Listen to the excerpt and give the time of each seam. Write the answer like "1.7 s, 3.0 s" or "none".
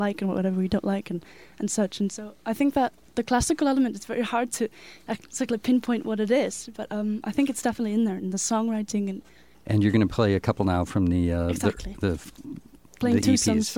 9.5 s